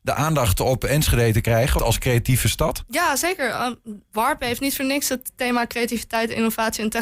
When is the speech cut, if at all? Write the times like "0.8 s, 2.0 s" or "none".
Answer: 1.8 s